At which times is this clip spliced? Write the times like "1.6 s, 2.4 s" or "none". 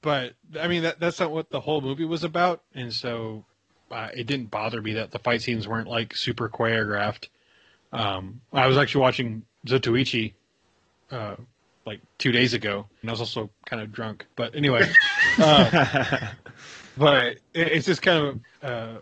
13.0 s